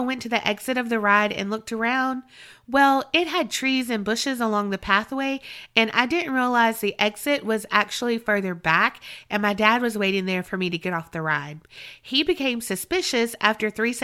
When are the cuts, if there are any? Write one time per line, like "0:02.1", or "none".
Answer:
none